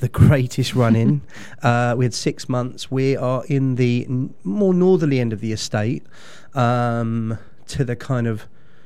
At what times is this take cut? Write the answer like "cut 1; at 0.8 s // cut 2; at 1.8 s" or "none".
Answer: none